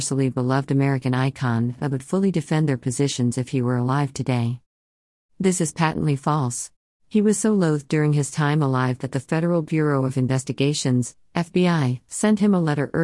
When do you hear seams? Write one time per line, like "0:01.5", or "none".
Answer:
0:07.0